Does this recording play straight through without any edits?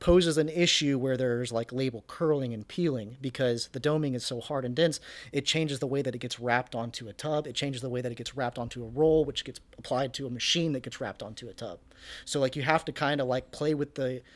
yes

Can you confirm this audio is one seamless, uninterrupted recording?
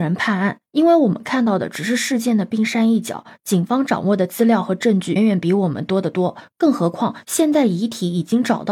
no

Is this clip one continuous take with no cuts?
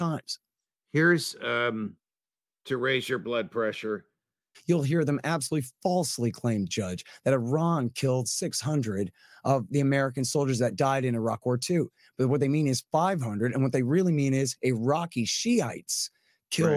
no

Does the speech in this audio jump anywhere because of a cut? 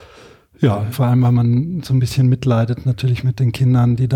yes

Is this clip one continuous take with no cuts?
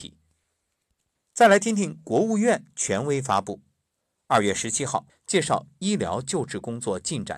no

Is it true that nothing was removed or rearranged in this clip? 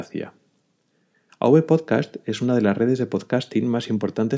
no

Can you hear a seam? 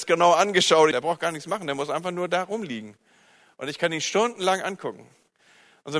yes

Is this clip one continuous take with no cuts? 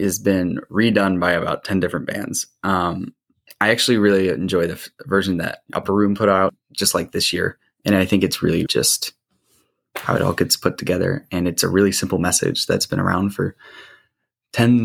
no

